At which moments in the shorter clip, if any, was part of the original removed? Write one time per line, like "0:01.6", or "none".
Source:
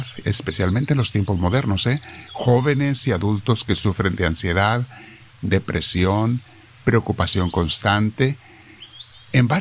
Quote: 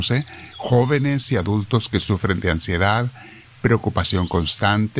0:03.4